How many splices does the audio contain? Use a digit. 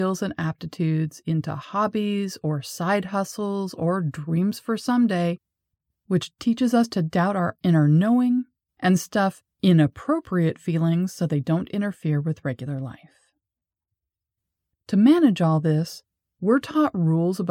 1